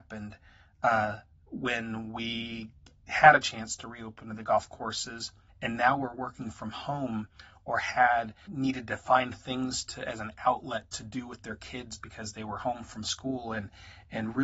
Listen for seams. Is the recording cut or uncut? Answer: cut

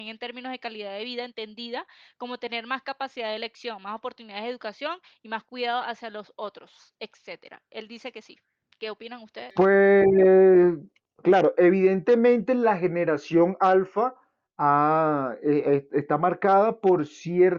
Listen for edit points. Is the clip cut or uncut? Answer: cut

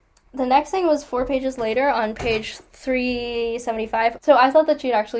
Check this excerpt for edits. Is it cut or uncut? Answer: cut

